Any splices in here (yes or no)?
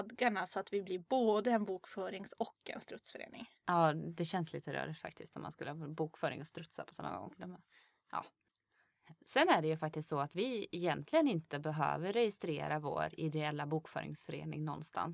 no